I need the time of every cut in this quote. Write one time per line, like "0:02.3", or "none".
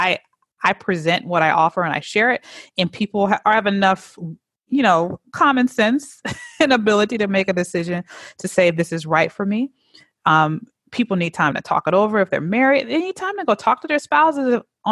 none

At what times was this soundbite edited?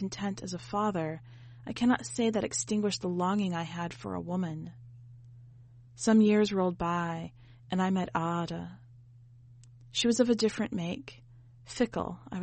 none

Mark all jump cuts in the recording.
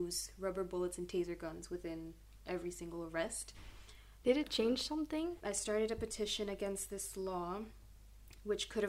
0:04.2
0:05.4

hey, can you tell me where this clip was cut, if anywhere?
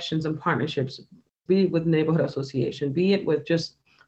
0:01.5

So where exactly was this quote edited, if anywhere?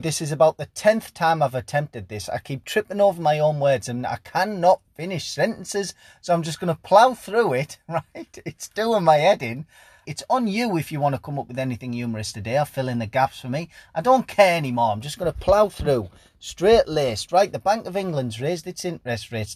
0:10.0

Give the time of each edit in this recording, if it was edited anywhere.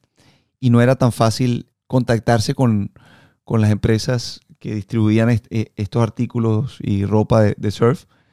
0:01.7

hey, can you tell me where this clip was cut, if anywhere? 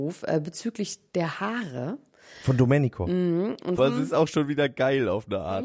0:03.8

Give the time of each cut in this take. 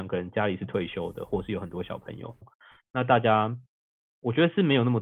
0:02.4

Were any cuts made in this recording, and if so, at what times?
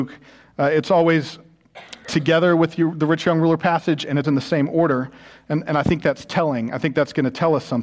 0:04.2

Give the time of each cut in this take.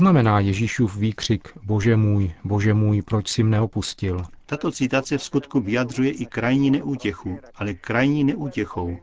0:04.4
0:07.5

